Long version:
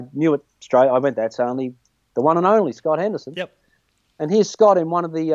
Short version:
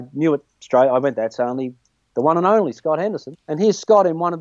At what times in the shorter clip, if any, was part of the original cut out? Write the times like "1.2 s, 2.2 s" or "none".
3.3 s